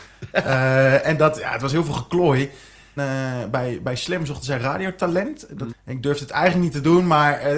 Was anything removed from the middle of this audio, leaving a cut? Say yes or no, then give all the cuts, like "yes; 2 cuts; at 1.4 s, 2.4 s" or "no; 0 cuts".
yes; 3 cuts; at 1.0 s, 3.0 s, 5.7 s